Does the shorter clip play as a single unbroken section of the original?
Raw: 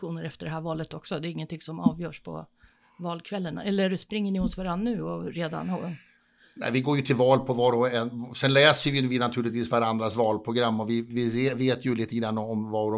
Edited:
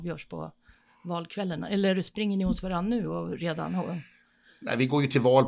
yes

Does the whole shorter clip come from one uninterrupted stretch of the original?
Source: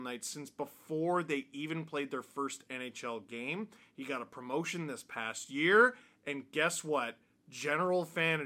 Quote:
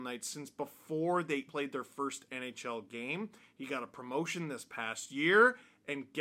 no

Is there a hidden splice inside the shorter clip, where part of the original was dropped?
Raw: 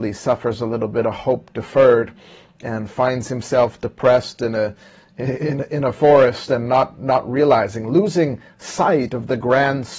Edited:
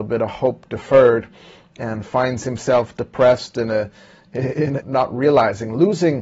yes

